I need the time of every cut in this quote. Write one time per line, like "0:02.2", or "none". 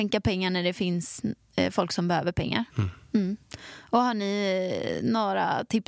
0:02.7